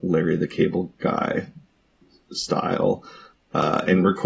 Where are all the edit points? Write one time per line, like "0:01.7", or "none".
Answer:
0:03.3